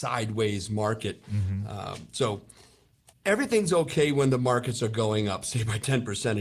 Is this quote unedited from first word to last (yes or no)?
no